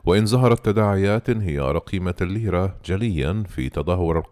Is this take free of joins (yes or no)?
yes